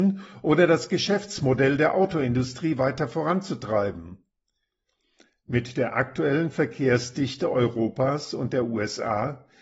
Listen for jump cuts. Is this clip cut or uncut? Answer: uncut